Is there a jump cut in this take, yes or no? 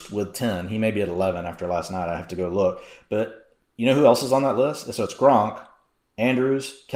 no